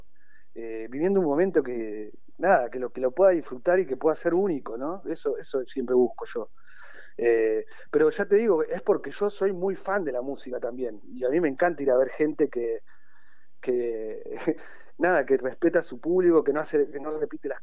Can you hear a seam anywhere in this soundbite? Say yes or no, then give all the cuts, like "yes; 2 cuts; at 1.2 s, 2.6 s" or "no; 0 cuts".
no; 0 cuts